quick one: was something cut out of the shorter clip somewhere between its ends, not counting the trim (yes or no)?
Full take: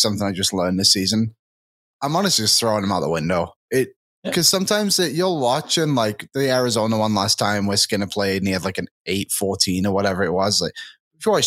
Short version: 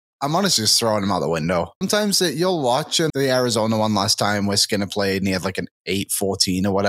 yes